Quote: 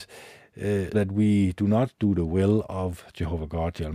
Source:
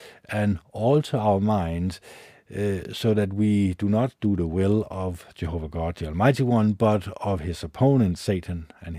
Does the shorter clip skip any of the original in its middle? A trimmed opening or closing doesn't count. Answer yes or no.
yes